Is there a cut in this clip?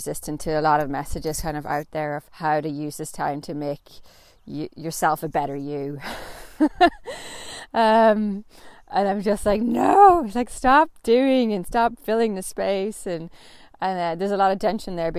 yes; 1 cut; at 2.3 s

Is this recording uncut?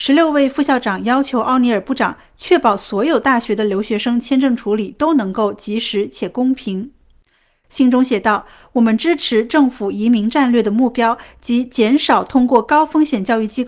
yes; 0 cuts

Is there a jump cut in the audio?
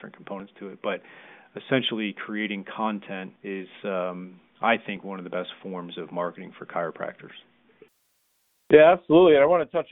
yes; 1 cut; at 3.4 s

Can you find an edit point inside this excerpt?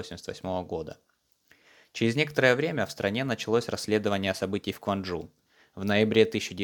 no; 0 cuts

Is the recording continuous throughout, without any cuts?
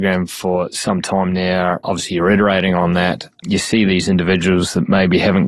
yes; 0 cuts

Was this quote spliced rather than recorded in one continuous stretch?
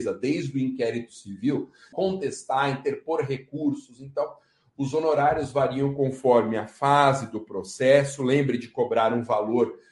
yes; 1 cut; at 1.9 s

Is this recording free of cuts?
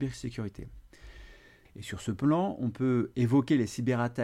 no; 1 cut; at 1.7 s

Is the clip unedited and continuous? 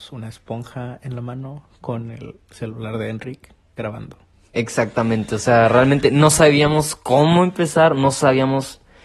yes; 0 cuts

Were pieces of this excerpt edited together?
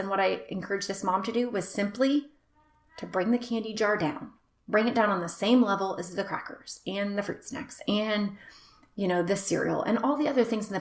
no; 0 cuts

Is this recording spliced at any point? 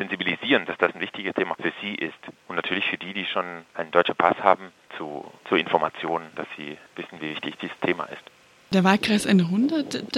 no; 0 cuts

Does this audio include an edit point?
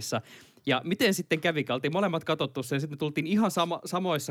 no; 0 cuts

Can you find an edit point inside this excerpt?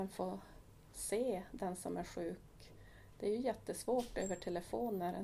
no; 0 cuts

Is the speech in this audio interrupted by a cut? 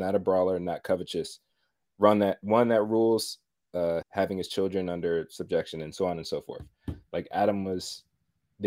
yes; 2 cuts; at 4.0 s, 7.1 s

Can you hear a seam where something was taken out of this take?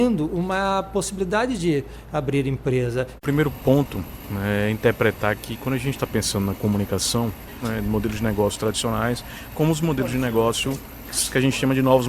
yes; 2 cuts; at 3.2 s, 7.6 s

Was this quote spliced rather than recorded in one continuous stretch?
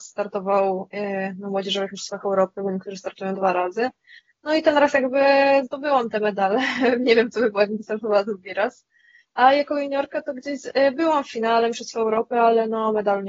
no; 0 cuts

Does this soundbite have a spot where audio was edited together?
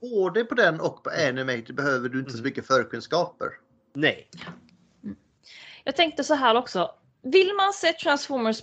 no; 0 cuts

